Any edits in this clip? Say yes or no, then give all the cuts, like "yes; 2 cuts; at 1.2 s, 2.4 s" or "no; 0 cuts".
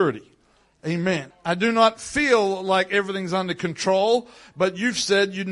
yes; 1 cut; at 1.3 s